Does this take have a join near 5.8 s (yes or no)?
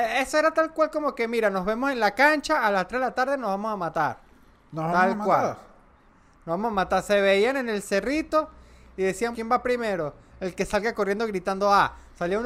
no